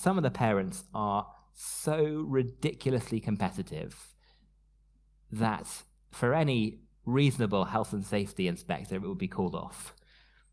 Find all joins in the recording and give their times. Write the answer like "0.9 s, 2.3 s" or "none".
none